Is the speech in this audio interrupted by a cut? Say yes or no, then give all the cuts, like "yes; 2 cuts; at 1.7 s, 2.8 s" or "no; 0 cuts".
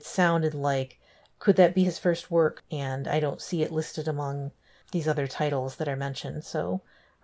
yes; 2 cuts; at 2.6 s, 4.8 s